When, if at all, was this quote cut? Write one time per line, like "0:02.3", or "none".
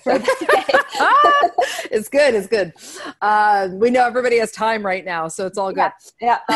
none